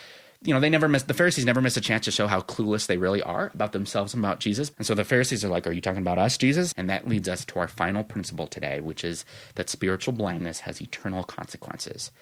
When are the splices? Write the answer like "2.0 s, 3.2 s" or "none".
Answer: 4.7 s, 6.7 s